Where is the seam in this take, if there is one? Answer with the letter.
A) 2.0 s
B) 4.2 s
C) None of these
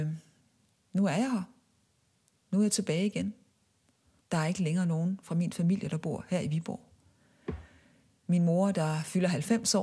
B